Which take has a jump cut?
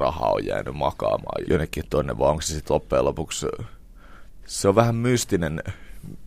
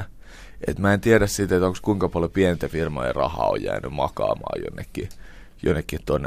first; 1 cut; at 1.4 s

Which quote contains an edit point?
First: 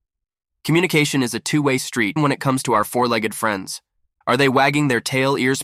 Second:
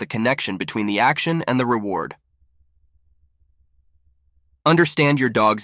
first; 2 cuts; at 2.2 s, 4.2 s

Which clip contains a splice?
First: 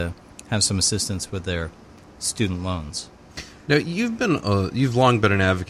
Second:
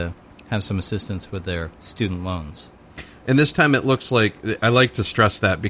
second; 3 cuts; at 1.7 s, 3.2 s, 4.6 s

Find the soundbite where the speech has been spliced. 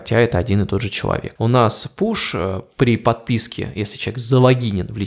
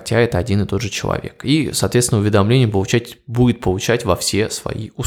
first; 1 cut; at 1.4 s

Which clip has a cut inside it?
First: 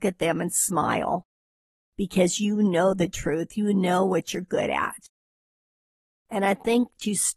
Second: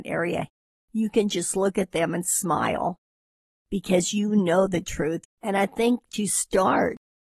second; 1 cut; at 5.2 s

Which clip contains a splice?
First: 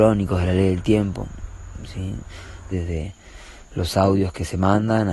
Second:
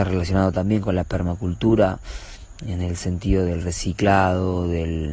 first; 1 cut; at 2.7 s

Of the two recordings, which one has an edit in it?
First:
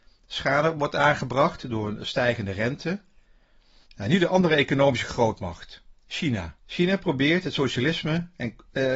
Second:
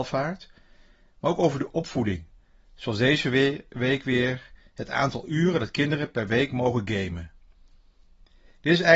first; 2 cuts; at 3.9 s, 6.6 s

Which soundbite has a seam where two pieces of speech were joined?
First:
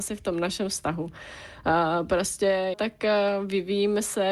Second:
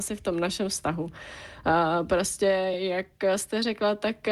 first; 1 cut; at 2.7 s

